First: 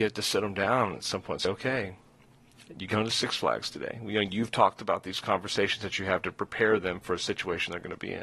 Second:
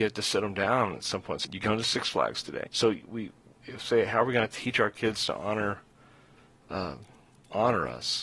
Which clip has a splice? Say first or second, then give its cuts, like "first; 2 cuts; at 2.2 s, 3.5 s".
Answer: second; 2 cuts; at 1.4 s, 2.7 s